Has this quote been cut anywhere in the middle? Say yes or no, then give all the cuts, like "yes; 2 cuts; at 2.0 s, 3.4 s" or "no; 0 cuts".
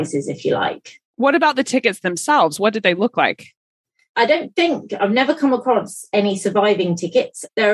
yes; 1 cut; at 1.1 s